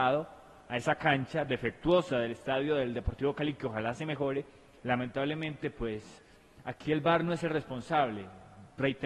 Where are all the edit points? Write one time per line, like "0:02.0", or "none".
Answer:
0:04.8